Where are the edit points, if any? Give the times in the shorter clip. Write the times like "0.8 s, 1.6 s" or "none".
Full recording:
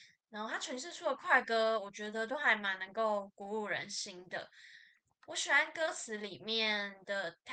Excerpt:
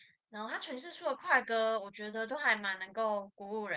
none